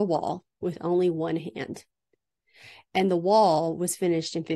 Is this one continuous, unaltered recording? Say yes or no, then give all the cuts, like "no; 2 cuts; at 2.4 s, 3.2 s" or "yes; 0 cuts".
yes; 0 cuts